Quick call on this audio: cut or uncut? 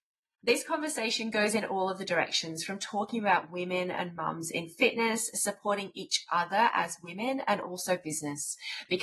uncut